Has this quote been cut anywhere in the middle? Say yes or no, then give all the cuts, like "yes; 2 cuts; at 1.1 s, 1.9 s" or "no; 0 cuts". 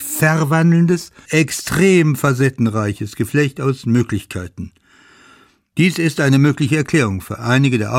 yes; 1 cut; at 1.3 s